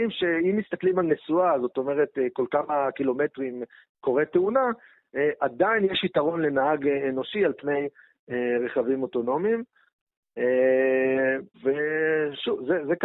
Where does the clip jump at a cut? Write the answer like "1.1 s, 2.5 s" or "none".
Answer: 11.5 s